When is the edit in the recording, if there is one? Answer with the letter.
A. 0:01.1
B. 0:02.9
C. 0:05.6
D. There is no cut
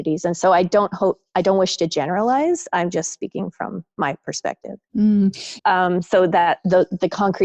C